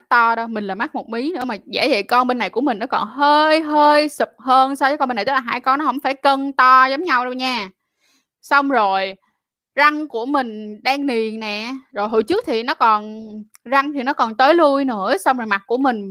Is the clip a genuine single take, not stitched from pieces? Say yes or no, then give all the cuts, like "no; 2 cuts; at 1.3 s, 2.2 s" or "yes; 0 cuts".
yes; 0 cuts